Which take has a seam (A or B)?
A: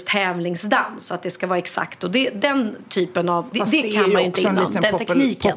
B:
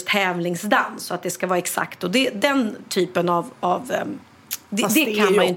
A